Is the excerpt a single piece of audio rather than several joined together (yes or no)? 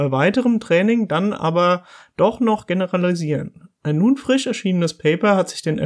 yes